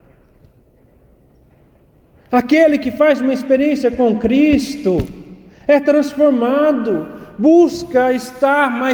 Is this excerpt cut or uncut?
uncut